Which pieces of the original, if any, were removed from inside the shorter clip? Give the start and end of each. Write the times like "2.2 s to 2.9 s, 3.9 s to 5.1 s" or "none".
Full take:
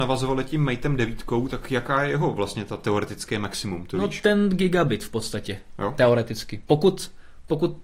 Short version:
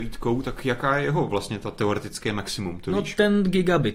none